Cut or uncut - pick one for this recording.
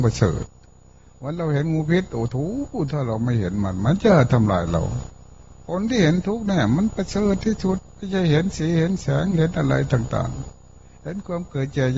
cut